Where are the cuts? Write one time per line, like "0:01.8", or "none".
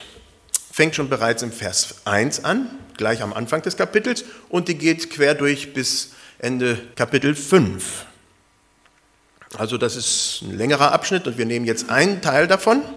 0:00.9
0:06.9